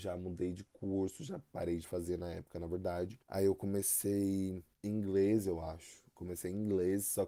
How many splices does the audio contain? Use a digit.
2